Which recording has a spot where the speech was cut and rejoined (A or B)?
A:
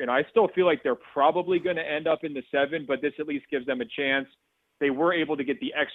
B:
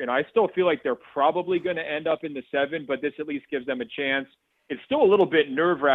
B